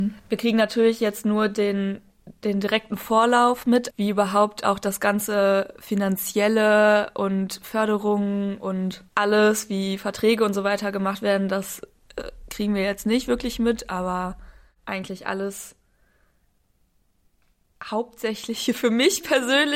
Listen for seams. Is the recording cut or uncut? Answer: cut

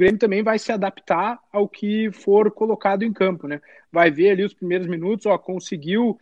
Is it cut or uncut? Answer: uncut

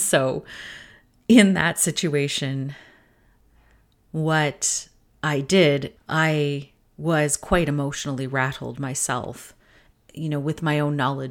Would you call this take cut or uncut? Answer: cut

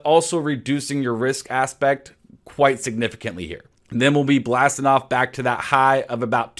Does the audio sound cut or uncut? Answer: cut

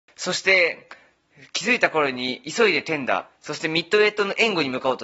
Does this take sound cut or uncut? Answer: uncut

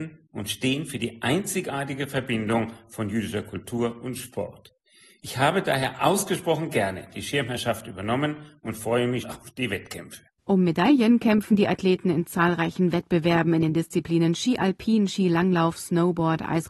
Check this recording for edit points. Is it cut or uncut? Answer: cut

